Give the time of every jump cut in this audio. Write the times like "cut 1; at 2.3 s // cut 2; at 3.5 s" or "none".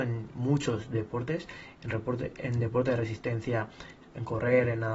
none